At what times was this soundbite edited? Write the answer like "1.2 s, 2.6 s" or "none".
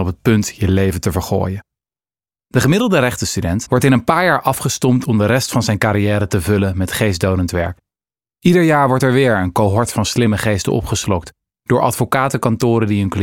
3.6 s